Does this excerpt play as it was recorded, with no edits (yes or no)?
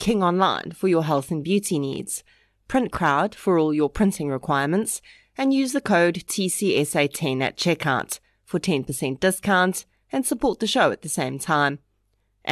yes